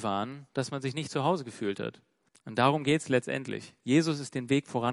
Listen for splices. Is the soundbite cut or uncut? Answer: cut